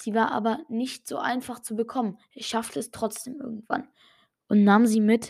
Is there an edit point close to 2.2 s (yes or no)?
no